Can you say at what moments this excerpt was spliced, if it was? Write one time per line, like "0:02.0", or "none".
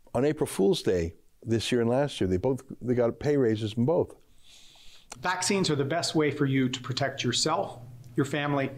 0:05.2